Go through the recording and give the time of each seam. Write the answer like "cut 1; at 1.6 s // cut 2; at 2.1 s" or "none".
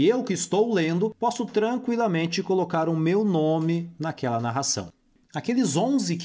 cut 1; at 5.3 s